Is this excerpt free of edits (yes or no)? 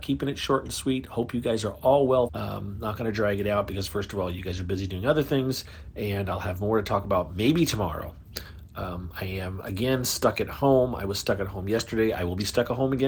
no